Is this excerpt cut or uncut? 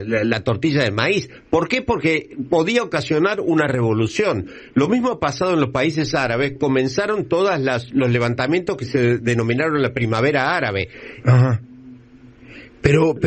cut